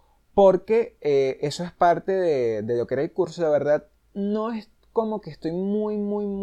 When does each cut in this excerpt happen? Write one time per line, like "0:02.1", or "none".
none